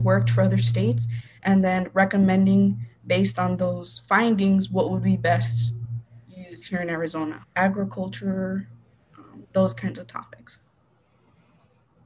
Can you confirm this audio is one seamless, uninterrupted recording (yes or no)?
no